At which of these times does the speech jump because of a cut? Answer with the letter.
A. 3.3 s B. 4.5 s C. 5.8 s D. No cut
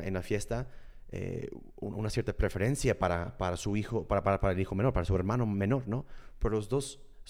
D